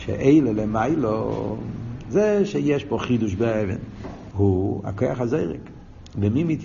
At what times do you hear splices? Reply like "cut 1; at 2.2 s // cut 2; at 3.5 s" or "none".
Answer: cut 1; at 4.3 s